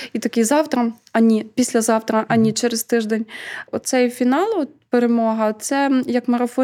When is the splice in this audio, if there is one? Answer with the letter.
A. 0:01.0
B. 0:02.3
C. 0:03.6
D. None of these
D